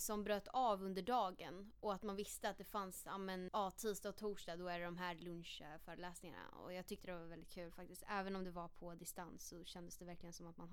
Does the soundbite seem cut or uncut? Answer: cut